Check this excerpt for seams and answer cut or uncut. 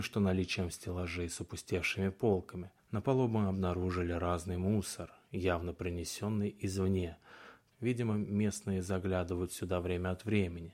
cut